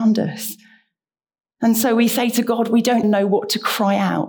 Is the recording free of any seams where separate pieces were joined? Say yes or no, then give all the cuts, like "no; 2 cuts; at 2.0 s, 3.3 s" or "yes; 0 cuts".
no; 1 cut; at 3.0 s